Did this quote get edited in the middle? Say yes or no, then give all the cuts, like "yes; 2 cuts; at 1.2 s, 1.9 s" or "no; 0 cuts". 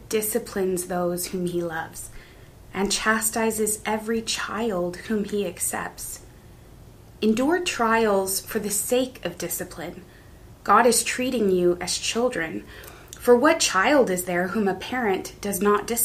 no; 0 cuts